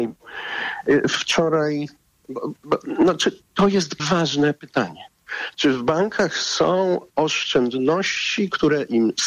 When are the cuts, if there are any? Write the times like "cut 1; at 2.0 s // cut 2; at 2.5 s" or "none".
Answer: cut 1; at 4.0 s